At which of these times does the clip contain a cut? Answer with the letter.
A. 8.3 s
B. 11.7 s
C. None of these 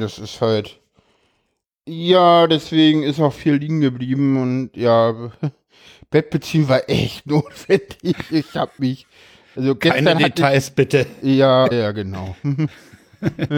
B